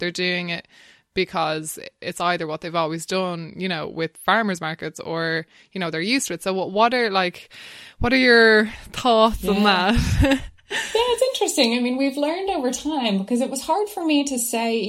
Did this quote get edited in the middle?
no; 0 cuts

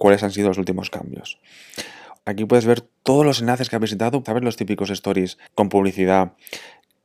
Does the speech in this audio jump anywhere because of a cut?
yes; 3 cuts; at 2.2 s, 4.3 s, 5.5 s

